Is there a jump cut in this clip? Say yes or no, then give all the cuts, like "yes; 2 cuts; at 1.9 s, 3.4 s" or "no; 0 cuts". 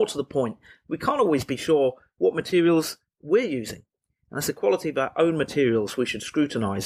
no; 0 cuts